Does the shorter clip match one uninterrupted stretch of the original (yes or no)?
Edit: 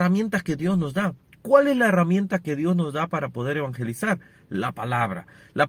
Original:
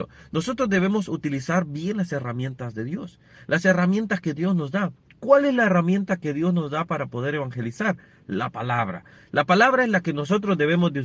yes